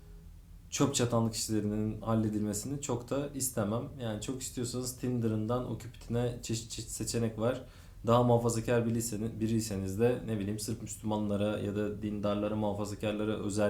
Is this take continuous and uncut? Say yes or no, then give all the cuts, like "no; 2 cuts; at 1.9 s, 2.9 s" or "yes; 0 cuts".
yes; 0 cuts